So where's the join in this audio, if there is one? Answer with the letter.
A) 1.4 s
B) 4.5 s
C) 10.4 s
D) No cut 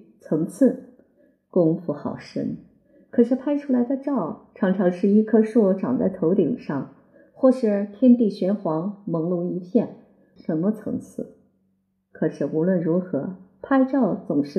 C